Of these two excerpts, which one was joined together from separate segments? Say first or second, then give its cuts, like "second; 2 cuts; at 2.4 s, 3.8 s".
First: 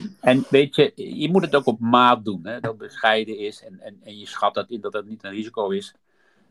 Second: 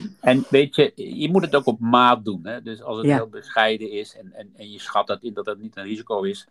first; 1 cut; at 2.6 s